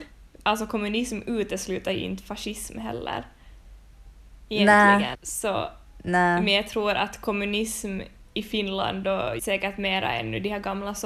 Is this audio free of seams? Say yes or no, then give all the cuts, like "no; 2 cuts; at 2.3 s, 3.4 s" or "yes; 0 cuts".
no; 2 cuts; at 5.1 s, 9.4 s